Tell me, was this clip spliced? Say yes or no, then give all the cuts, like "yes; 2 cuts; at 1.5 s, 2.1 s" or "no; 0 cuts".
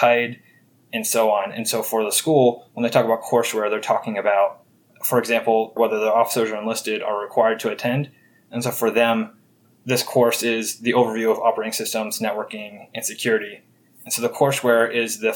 yes; 1 cut; at 5.8 s